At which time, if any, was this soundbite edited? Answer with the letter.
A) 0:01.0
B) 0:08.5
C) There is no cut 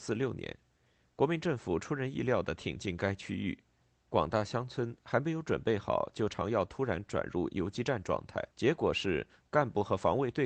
B